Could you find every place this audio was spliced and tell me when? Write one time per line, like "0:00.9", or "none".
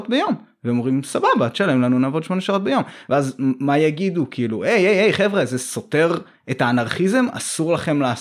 none